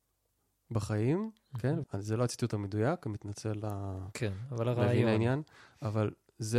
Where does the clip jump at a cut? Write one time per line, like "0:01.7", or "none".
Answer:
0:01.8